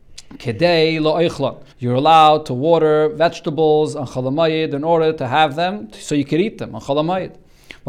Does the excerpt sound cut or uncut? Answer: cut